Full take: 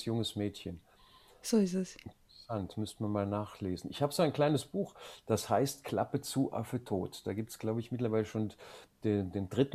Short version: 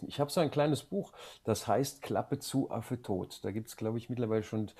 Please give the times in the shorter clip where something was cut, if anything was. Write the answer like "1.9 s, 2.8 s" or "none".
none